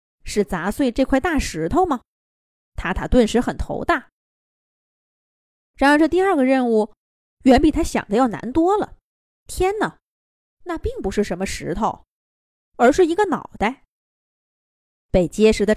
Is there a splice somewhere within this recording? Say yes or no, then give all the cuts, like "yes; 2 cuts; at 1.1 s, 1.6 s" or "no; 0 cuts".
yes; 1 cut; at 9.4 s